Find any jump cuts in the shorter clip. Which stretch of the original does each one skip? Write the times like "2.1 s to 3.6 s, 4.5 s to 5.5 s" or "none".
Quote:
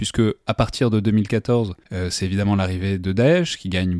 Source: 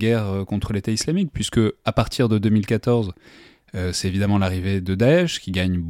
3.2 s to 3.7 s